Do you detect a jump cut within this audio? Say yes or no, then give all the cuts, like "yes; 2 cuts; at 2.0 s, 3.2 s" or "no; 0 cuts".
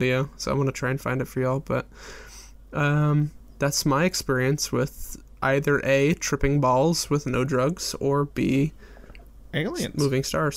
no; 0 cuts